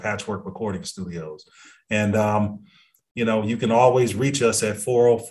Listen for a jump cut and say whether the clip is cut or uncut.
uncut